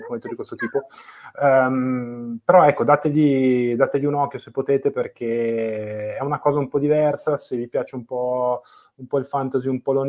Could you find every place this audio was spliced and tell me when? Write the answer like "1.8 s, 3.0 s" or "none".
none